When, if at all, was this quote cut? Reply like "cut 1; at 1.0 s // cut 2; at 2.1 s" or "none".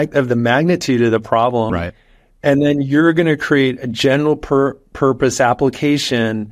cut 1; at 1.7 s